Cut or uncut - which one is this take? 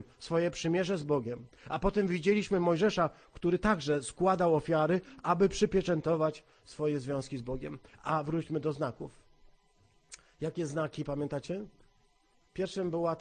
uncut